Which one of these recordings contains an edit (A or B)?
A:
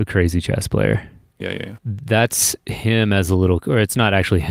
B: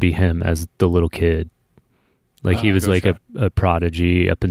A